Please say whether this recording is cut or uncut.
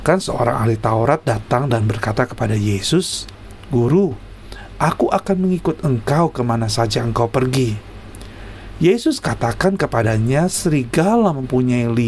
uncut